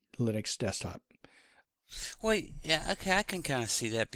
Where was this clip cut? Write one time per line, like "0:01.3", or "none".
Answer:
none